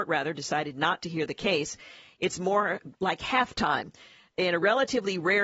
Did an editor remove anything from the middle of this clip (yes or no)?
no